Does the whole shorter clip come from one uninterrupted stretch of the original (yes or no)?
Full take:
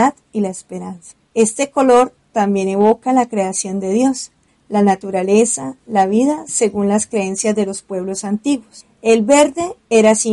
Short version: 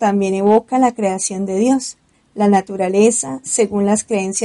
no